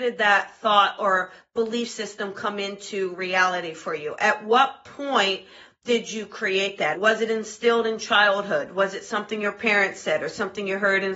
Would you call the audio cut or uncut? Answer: cut